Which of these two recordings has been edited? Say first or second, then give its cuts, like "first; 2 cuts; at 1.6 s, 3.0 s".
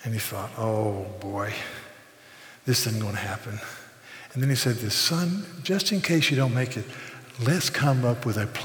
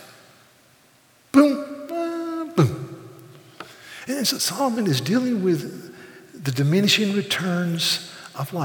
second; 1 cut; at 4.4 s